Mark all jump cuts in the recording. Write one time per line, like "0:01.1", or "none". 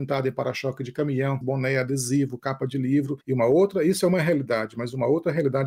0:01.4